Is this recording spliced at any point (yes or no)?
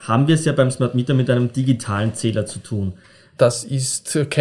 yes